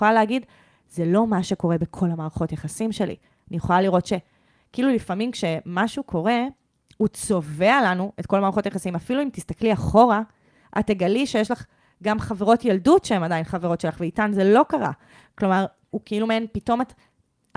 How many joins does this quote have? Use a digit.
1